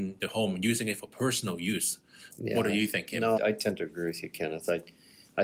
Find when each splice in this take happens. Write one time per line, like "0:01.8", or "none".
0:02.3
0:03.4